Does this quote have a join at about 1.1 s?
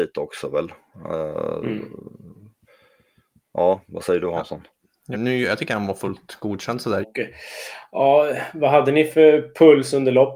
no; 2 cuts; at 5.1 s, 7.0 s

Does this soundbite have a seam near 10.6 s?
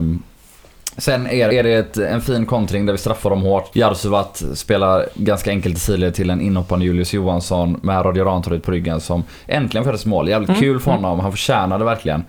no; 2 cuts; at 1.5 s, 3.7 s

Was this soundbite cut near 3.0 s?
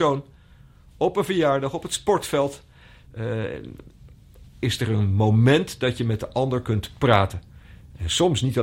no; 1 cut; at 4.4 s

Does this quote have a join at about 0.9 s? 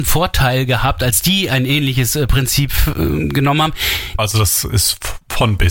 no; 1 cut; at 4.2 s

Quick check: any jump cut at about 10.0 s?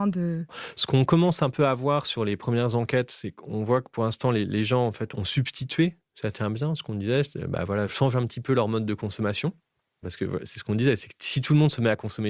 yes; 1 cut; at 10.0 s

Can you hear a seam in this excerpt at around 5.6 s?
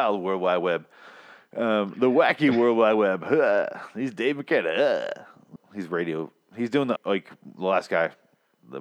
yes; 2 cuts; at 5.6 s, 7.0 s

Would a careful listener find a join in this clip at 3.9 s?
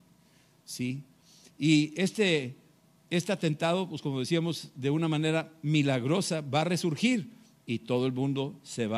no; 0 cuts

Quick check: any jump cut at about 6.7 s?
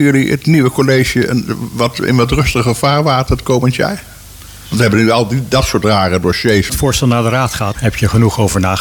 yes; 2 cuts; at 6.7 s, 7.7 s

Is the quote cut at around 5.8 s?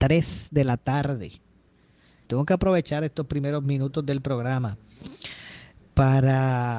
no; 1 cut; at 2.2 s

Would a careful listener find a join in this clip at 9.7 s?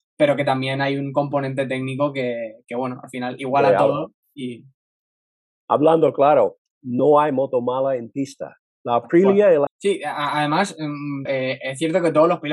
yes; 2 cuts; at 9.7 s, 11.3 s

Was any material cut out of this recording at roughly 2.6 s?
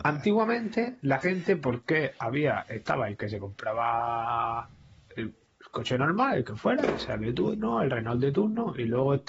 no; 0 cuts

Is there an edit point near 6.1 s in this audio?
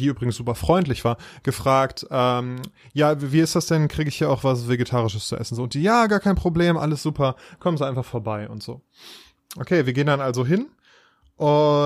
no; 0 cuts

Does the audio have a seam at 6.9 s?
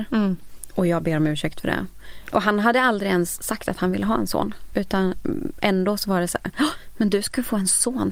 no; 1 cut; at 2.3 s

